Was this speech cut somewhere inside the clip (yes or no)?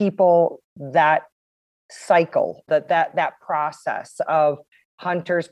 yes